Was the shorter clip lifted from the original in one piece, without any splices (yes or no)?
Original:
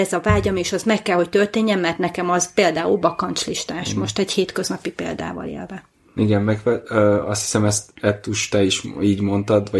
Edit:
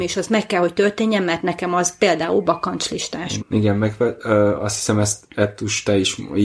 no